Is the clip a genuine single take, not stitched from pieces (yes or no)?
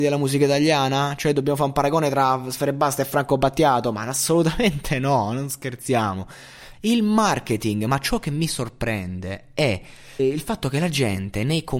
no